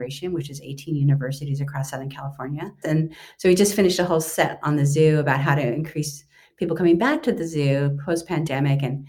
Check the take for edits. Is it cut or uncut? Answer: cut